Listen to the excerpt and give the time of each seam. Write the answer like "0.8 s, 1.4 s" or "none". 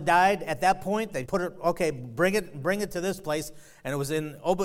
1.3 s